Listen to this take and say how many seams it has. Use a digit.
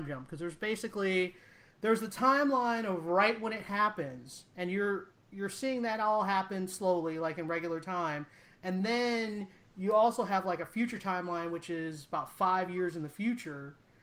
0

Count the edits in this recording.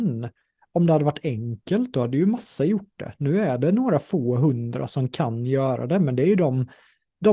0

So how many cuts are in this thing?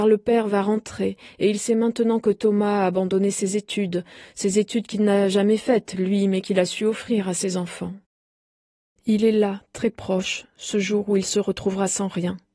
1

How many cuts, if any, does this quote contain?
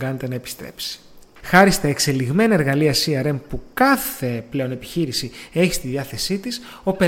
1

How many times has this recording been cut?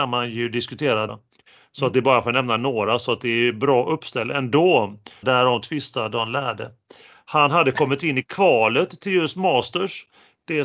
2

